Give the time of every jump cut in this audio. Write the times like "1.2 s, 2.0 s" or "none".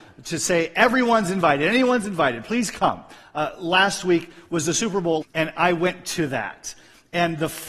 5.2 s